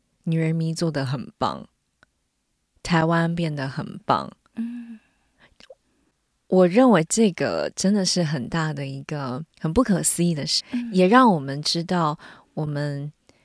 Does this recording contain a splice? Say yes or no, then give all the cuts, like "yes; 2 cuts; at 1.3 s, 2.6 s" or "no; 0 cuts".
yes; 2 cuts; at 9.5 s, 10.6 s